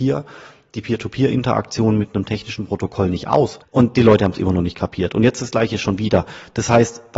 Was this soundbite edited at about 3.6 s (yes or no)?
yes